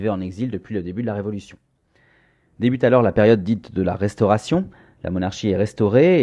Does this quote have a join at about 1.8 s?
no; 0 cuts

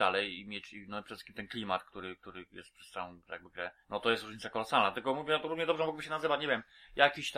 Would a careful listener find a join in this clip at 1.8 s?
no; 1 cut; at 3.8 s

